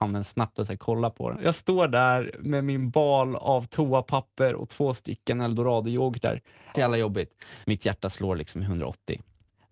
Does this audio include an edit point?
yes; 2 cuts; at 1.4 s, 6.7 s

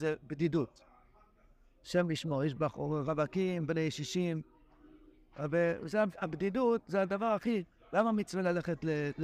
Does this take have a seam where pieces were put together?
no; 0 cuts

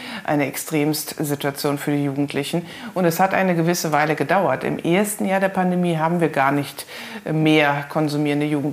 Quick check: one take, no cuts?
yes; 0 cuts

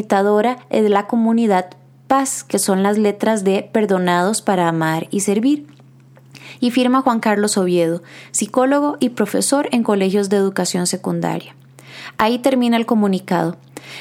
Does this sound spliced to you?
no; 0 cuts

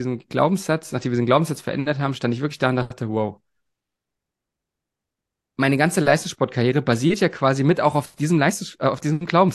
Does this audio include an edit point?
no; 0 cuts

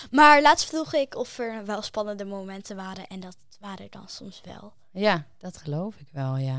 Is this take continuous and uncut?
no; 1 cut; at 3.9 s

